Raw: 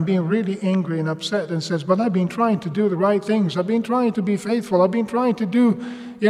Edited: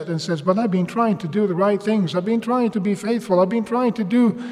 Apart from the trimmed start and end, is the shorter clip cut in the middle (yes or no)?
no